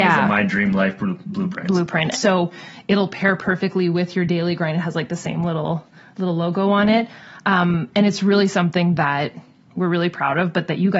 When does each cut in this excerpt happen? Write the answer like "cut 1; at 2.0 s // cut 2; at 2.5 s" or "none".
cut 1; at 2.1 s